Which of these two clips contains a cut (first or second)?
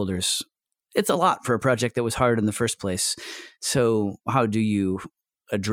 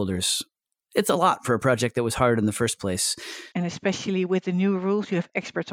second